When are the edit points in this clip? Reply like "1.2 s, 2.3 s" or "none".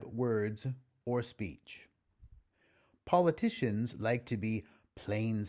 none

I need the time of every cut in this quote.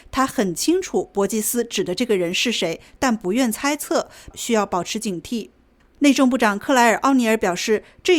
4.3 s, 5.8 s

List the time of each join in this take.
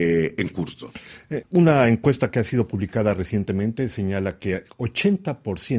1.4 s

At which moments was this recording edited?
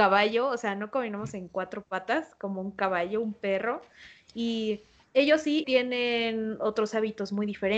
5.6 s

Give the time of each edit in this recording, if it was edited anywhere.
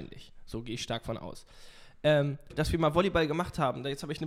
2.5 s

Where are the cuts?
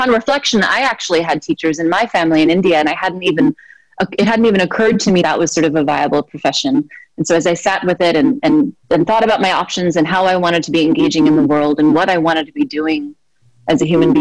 5.2 s, 8.8 s

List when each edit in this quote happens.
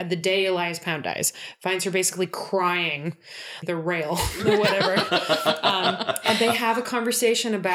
3.6 s

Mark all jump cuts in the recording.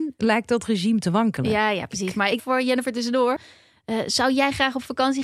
2.4 s

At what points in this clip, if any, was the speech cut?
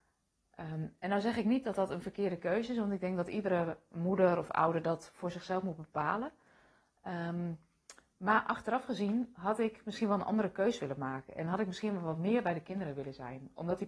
none

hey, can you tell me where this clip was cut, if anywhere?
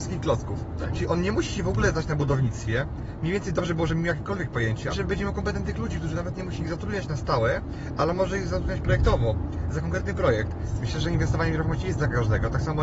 4.9 s, 10.8 s

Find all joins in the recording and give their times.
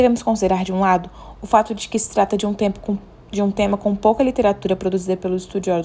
none

